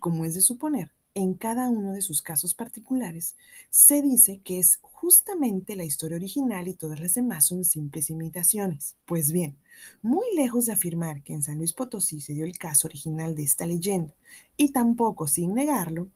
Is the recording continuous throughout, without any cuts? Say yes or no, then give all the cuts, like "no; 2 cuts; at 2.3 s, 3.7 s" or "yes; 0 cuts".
no; 1 cut; at 9.0 s